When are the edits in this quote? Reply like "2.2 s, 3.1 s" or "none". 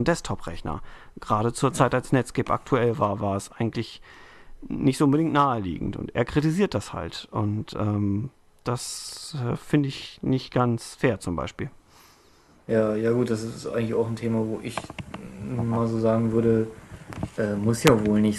none